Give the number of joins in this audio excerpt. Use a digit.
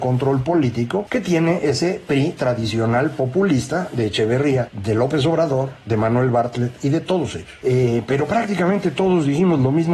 1